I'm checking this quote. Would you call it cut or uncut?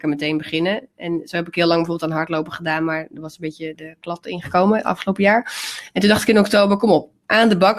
uncut